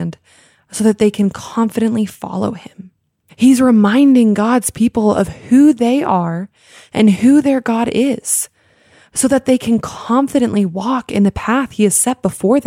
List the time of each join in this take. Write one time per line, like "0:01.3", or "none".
0:03.3